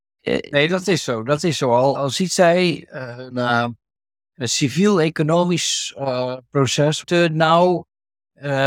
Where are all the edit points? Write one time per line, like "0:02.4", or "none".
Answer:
0:01.9
0:03.3
0:07.0